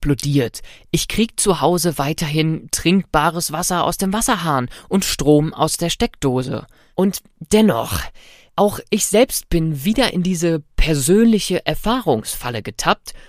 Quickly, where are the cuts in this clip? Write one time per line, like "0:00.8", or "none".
0:06.9